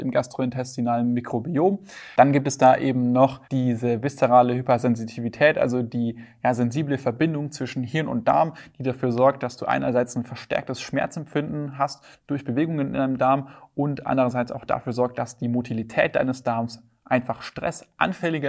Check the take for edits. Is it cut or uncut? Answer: cut